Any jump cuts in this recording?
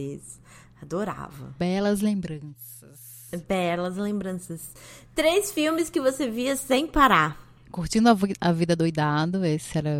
no; 0 cuts

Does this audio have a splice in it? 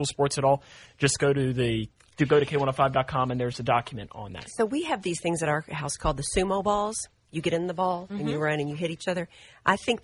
no; 0 cuts

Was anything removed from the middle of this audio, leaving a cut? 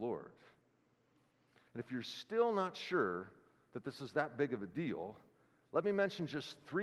no; 0 cuts

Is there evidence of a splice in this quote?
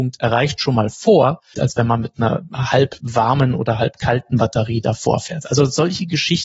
yes; 1 cut; at 1.5 s

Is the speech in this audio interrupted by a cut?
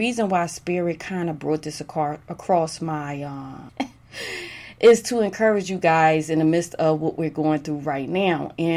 yes; 1 cut; at 3.7 s

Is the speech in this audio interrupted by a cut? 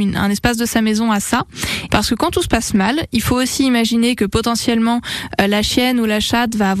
yes; 1 cut; at 1.9 s

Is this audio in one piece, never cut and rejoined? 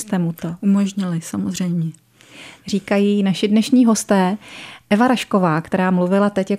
yes; 0 cuts

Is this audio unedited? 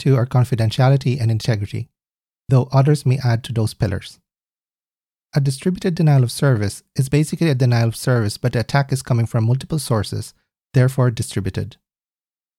yes; 0 cuts

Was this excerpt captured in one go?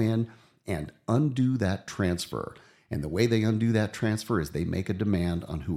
yes; 0 cuts

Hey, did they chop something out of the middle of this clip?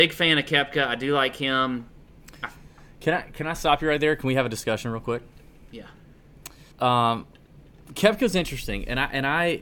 yes; 1 cut; at 6.7 s

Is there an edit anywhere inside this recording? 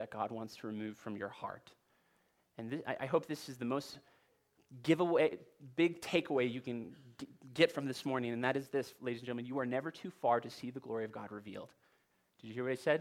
no; 0 cuts

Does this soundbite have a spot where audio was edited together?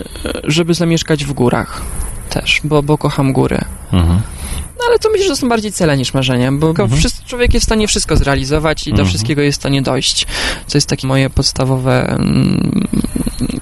yes; 2 cuts; at 6.7 s, 11.0 s

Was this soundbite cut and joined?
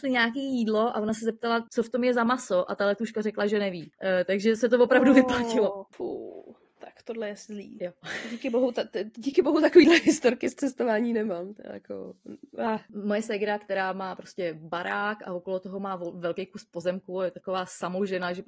no; 0 cuts

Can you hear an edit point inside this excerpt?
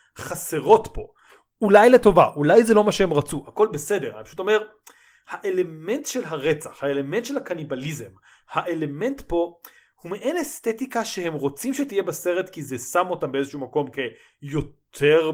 no; 0 cuts

